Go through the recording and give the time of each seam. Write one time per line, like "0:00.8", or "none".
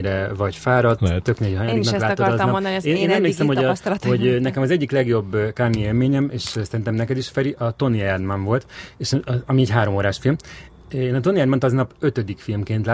none